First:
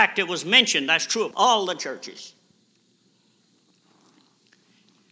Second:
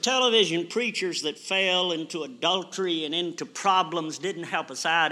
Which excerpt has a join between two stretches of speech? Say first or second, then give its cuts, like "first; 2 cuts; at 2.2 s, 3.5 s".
first; 2 cuts; at 1.3 s, 3.4 s